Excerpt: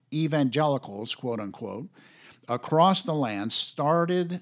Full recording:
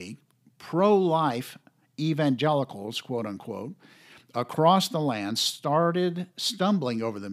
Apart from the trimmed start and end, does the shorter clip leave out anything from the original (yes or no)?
no